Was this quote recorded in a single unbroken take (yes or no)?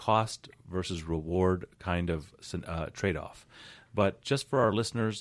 no